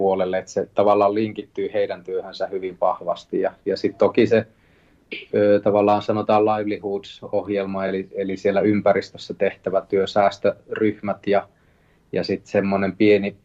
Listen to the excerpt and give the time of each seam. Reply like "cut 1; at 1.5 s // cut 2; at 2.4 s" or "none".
none